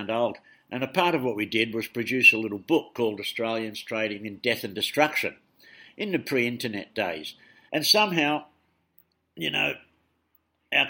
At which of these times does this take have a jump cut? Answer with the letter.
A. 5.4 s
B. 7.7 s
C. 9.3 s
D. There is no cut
B